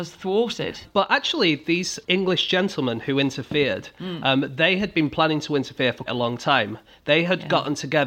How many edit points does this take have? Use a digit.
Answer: 1